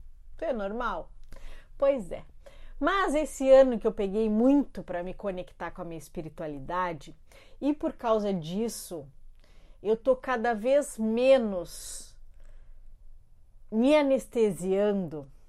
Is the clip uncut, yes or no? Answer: yes